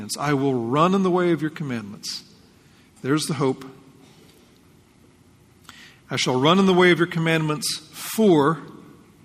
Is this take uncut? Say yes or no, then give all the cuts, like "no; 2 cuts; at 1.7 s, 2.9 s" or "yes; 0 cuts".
yes; 0 cuts